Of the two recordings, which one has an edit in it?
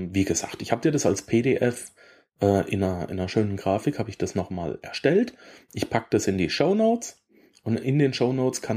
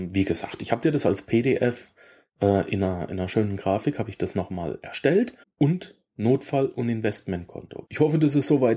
second; 2 cuts; at 5.4 s, 7.9 s

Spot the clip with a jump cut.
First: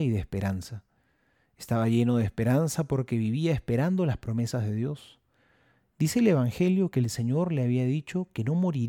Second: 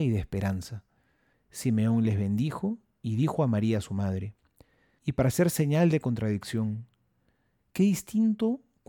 second; 3 cuts; at 1.3 s, 5.0 s, 7.6 s

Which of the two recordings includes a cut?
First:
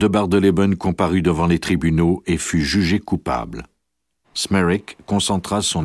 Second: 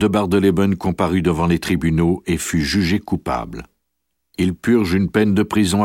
first; 1 cut; at 4.2 s

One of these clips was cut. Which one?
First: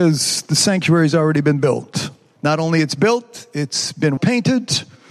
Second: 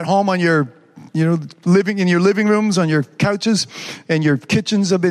first; 2 cuts; at 2.4 s, 4.2 s

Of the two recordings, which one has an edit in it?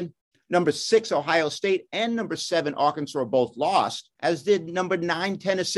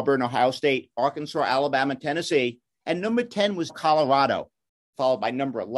second; 1 cut; at 3.7 s

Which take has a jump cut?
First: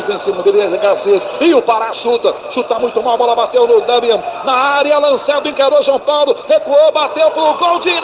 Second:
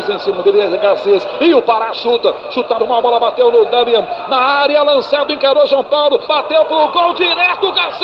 second; 2 cuts; at 2.8 s, 6.3 s

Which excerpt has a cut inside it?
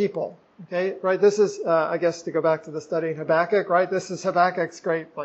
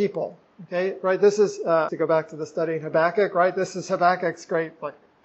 second; 1 cut; at 1.9 s

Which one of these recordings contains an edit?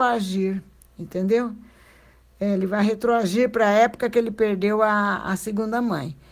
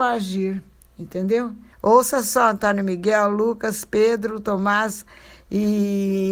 second; 1 cut; at 1.7 s

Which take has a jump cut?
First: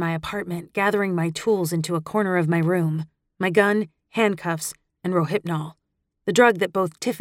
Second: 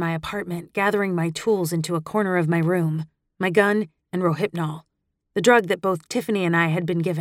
second; 1 cut; at 4.0 s

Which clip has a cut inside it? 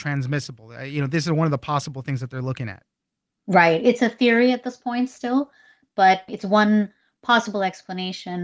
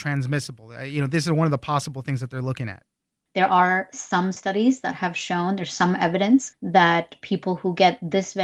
second; 1 cut; at 3.3 s

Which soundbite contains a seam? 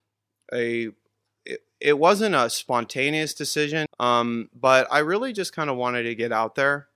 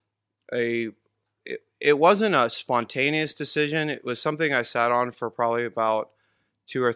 first; 1 cut; at 3.9 s

